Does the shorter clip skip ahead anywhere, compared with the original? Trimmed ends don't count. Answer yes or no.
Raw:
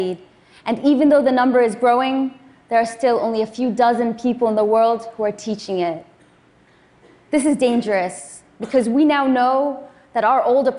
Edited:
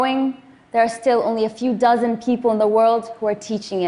no